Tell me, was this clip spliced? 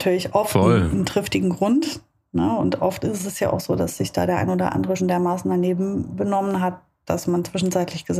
yes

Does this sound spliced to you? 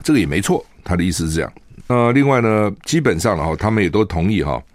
yes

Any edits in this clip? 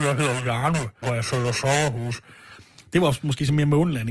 yes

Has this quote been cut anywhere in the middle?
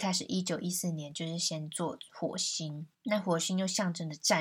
yes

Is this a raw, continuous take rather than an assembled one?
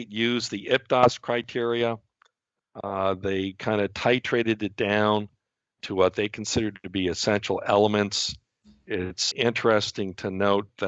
no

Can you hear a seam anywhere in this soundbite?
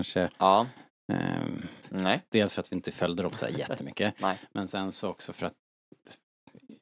yes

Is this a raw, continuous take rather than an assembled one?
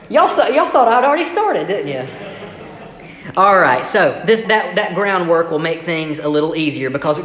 no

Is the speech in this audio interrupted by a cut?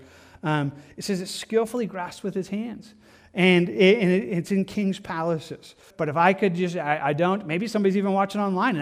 yes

